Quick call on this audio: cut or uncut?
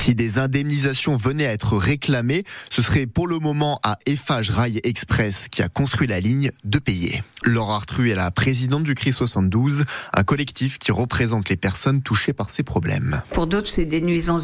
cut